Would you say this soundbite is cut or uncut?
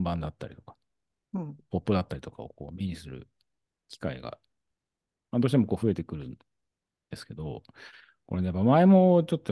uncut